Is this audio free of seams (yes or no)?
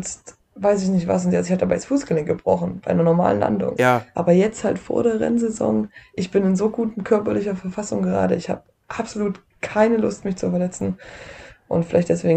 no